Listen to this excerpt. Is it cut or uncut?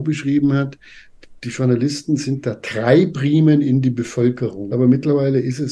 cut